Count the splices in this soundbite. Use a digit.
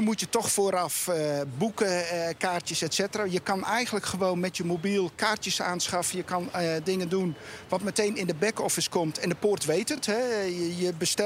0